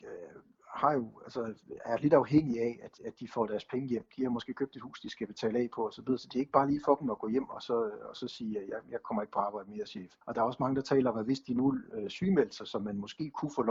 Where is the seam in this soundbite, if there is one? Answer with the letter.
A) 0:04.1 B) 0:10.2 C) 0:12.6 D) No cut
B